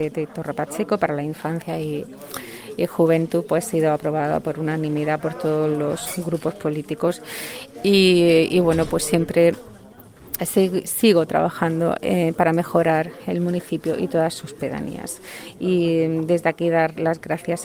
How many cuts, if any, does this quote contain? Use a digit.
0